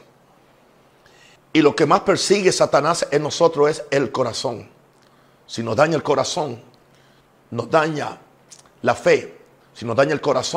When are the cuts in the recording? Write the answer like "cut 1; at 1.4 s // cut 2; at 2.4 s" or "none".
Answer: cut 1; at 1.4 s